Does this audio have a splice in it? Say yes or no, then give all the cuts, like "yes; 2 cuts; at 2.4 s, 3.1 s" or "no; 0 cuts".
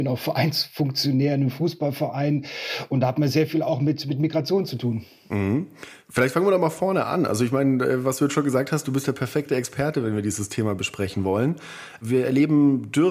no; 0 cuts